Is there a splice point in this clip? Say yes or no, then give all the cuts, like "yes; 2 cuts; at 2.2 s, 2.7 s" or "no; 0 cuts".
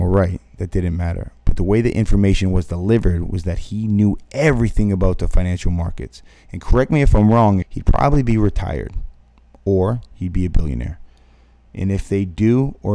yes; 2 cuts; at 7.6 s, 11.7 s